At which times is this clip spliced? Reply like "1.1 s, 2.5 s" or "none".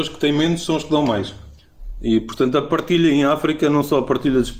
none